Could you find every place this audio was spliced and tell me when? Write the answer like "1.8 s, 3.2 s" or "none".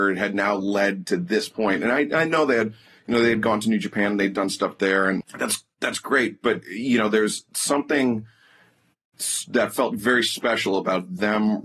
5.2 s